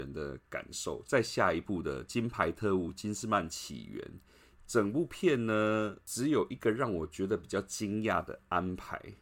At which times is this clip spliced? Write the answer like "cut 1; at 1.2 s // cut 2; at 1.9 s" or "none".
cut 1; at 1.0 s // cut 2; at 4.6 s

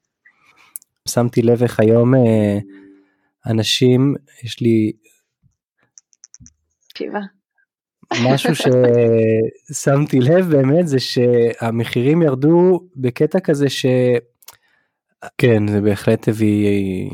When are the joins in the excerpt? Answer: cut 1; at 1.1 s // cut 2; at 15.3 s

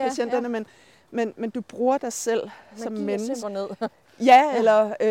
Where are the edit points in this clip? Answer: cut 1; at 3.4 s

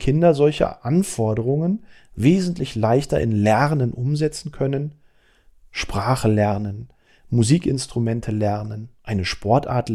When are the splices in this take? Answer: none

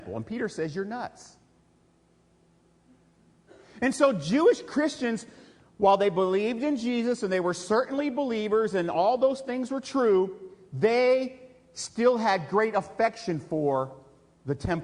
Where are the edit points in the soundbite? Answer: none

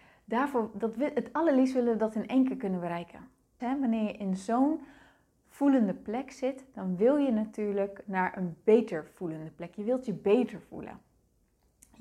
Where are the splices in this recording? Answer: cut 1; at 3.6 s

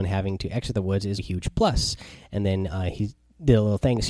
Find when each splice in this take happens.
cut 1; at 1.2 s

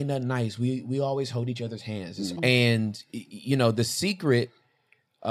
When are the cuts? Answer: cut 1; at 2.4 s

